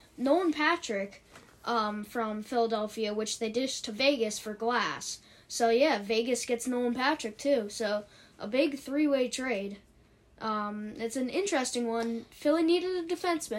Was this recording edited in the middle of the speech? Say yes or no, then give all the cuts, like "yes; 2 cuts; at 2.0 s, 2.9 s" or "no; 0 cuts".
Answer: no; 0 cuts